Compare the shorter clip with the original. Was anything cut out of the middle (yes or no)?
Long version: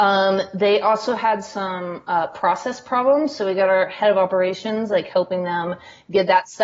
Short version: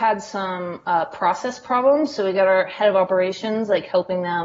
no